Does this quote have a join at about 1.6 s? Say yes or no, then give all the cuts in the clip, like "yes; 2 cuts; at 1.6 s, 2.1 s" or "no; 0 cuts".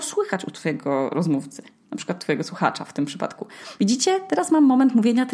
no; 1 cut; at 3.8 s